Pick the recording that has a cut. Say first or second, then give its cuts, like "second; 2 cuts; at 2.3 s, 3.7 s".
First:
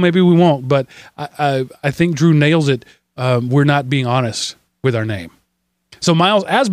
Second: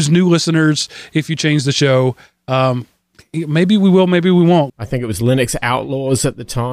second; 1 cut; at 4.7 s